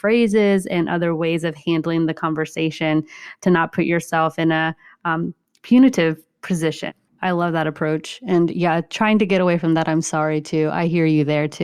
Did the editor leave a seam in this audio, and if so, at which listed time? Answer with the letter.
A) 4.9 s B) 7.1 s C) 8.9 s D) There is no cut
B